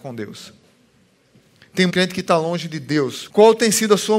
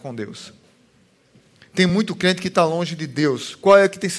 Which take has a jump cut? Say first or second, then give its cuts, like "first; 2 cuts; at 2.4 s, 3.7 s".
first; 2 cuts; at 1.9 s, 3.3 s